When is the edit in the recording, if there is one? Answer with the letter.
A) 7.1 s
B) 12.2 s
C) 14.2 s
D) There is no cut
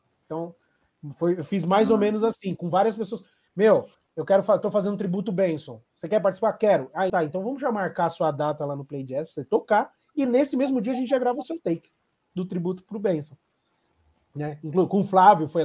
A